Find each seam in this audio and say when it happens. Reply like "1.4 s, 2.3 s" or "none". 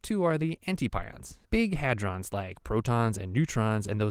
1.4 s